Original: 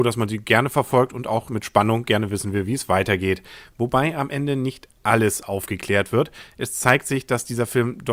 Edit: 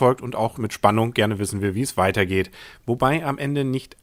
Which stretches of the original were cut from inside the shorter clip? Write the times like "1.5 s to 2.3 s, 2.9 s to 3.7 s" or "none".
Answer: none